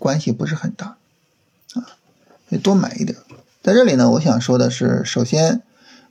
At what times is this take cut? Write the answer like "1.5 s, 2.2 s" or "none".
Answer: 3.5 s